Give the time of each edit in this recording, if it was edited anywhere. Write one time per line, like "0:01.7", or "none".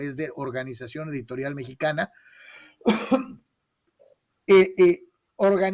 none